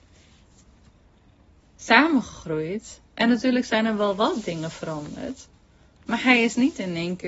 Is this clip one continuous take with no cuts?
yes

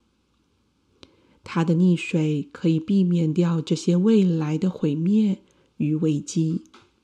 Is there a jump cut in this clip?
no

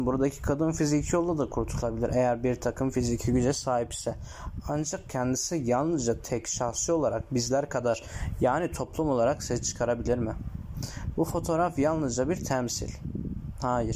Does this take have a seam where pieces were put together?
no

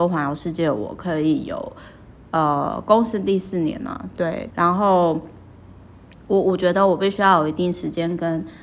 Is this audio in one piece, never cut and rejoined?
no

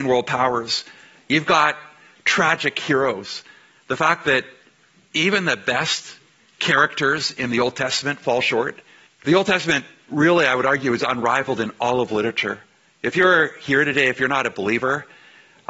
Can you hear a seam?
yes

